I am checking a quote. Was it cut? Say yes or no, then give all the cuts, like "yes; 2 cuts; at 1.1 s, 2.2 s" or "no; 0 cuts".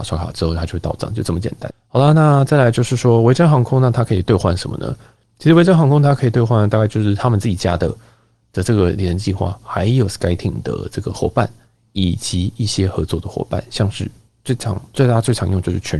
yes; 1 cut; at 1.7 s